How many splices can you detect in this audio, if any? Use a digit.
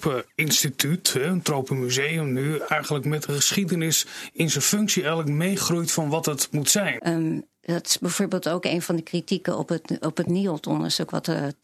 1